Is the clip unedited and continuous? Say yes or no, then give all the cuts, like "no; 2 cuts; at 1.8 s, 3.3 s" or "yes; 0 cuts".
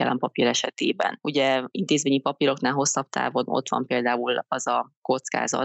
yes; 0 cuts